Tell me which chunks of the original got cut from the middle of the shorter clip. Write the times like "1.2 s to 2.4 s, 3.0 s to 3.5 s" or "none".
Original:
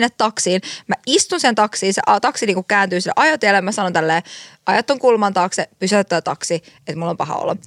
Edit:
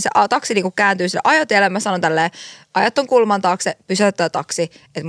none